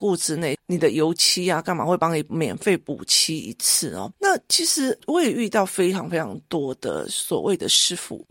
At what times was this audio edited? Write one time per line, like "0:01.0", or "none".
0:04.1